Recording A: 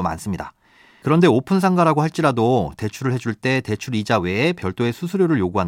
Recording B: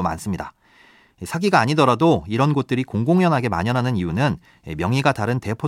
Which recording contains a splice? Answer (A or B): A